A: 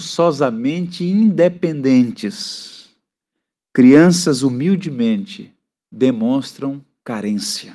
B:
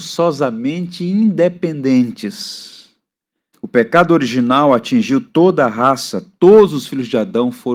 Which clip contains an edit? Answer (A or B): B